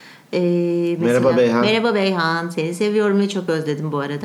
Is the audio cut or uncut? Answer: uncut